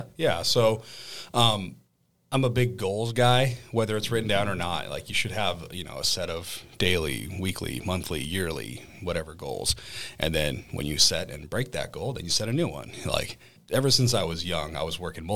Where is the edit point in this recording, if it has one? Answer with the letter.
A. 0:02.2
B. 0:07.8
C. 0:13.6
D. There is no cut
C